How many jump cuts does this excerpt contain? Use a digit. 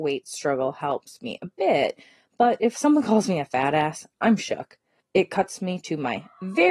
1